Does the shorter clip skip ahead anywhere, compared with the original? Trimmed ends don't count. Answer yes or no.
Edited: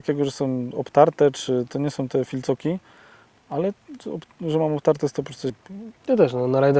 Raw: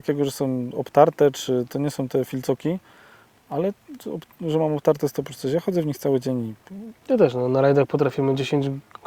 yes